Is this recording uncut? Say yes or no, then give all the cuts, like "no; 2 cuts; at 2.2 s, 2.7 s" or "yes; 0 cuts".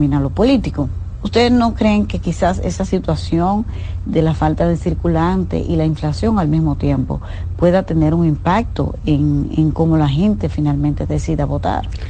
yes; 0 cuts